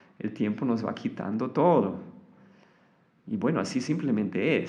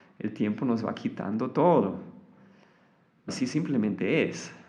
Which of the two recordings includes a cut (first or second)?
second